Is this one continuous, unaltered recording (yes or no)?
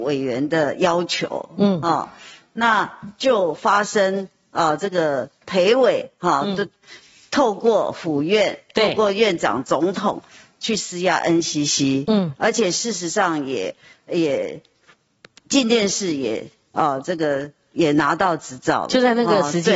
yes